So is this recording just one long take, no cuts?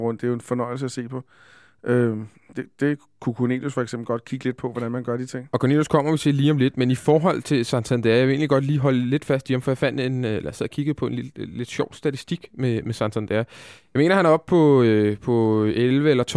yes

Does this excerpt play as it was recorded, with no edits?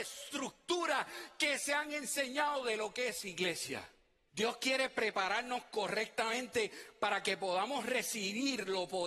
no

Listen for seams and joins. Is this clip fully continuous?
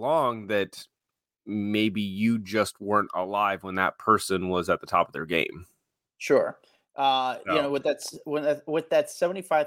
yes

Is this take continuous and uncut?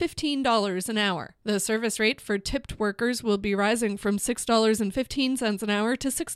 no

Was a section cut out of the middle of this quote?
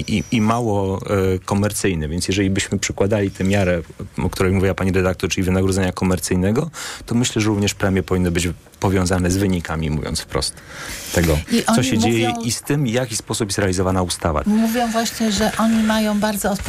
yes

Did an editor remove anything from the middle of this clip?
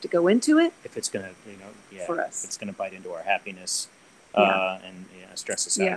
yes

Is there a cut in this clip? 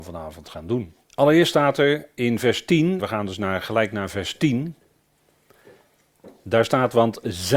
yes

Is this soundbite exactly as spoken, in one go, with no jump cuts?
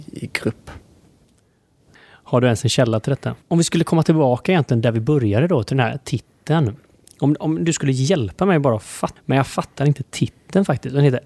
no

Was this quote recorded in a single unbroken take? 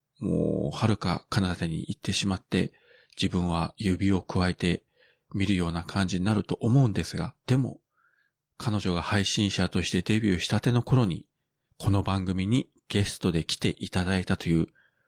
no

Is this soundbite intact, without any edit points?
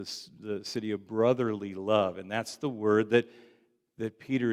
yes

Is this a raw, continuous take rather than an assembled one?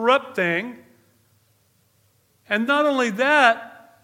no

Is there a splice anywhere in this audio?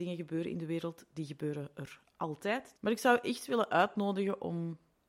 yes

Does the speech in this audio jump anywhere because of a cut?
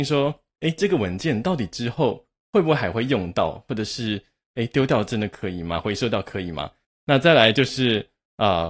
yes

